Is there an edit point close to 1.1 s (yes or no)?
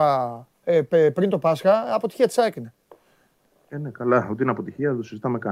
no